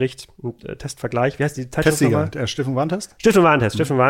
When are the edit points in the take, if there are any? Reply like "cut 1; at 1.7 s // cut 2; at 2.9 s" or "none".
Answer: none